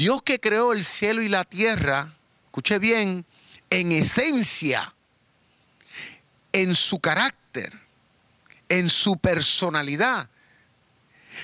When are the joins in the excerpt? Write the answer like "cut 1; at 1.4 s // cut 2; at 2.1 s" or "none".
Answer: none